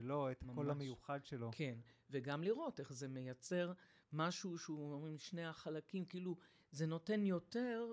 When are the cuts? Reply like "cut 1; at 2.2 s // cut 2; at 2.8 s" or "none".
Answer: none